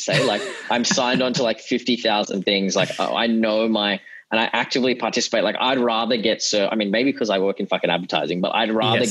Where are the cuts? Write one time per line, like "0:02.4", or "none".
none